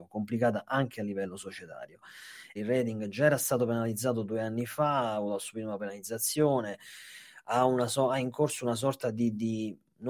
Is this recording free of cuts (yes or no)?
no